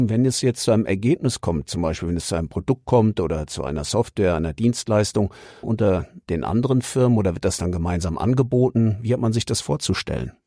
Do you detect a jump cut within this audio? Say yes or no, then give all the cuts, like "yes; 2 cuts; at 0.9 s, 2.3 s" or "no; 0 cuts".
yes; 1 cut; at 5.6 s